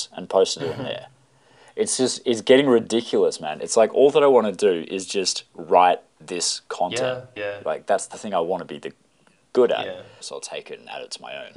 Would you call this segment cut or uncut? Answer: cut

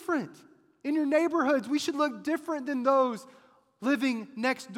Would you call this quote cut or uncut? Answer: uncut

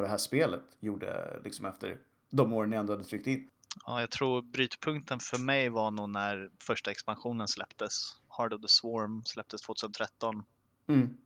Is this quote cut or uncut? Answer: uncut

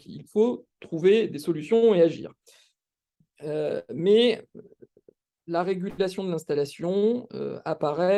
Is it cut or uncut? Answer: cut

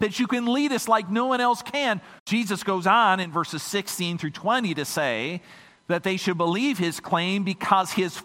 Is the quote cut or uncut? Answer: cut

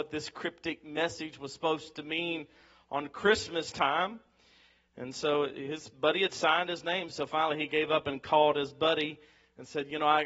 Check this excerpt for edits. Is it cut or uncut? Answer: uncut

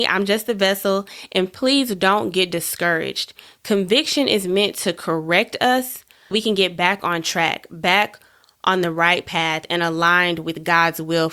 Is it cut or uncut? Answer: cut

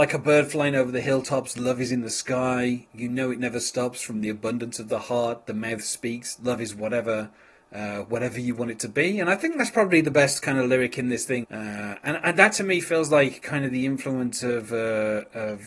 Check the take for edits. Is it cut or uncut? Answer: cut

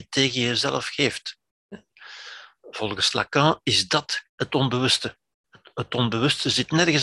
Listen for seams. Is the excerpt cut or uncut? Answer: cut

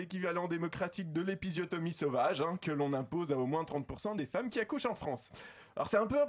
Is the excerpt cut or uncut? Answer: uncut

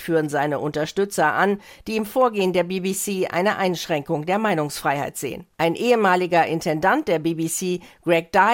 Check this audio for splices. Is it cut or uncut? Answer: cut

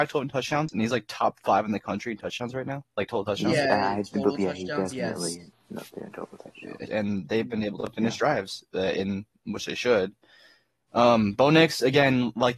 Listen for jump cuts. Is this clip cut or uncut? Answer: cut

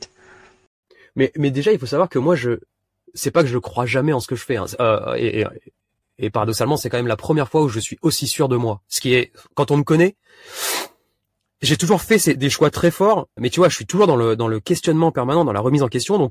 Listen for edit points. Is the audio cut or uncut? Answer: cut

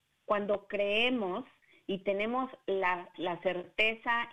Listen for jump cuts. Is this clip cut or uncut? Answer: cut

